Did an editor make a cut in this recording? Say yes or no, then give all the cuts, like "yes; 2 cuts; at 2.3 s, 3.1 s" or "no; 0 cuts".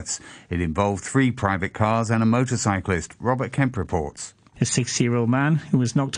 yes; 1 cut; at 4.5 s